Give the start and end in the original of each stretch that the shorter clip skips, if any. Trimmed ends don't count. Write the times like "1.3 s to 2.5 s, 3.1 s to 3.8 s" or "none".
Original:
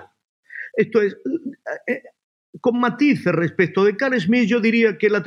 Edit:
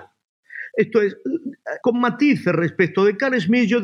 1.8 s to 2.6 s